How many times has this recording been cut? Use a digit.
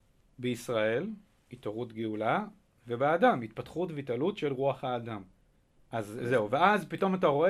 1